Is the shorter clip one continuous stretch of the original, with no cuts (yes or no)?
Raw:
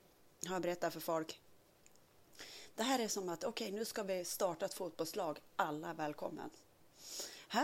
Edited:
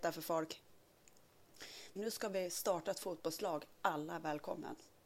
no